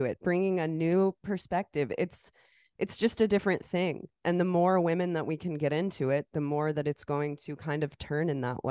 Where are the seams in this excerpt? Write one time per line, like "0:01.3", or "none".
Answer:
none